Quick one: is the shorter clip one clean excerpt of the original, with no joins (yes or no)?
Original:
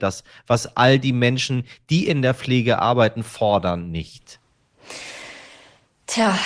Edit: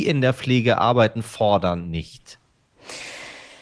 yes